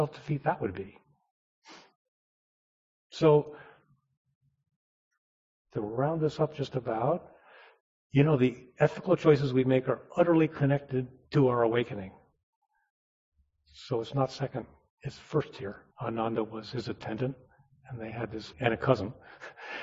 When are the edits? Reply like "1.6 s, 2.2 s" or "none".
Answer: 15.9 s, 18.5 s